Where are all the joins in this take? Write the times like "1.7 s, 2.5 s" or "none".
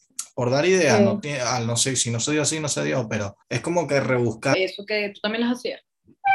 3.4 s, 4.5 s

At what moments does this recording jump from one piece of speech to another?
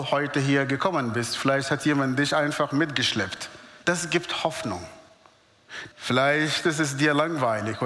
3.8 s, 5.9 s

